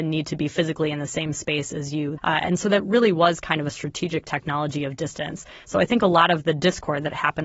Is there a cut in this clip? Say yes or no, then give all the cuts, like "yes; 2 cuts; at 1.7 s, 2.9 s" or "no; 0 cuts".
yes; 2 cuts; at 2.2 s, 5.6 s